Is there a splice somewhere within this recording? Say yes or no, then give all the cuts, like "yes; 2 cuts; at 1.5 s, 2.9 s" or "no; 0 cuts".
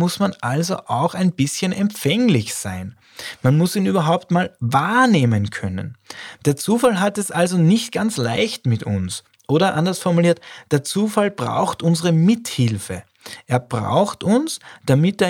yes; 1 cut; at 6.4 s